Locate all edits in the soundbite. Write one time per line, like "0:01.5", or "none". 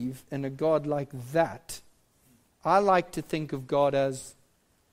none